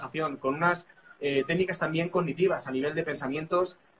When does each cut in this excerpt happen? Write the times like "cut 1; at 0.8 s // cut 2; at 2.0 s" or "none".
none